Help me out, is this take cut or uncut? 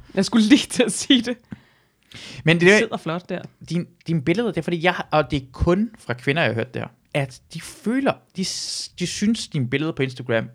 cut